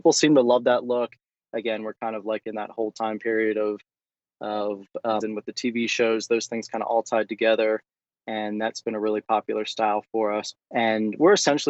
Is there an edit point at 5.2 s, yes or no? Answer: yes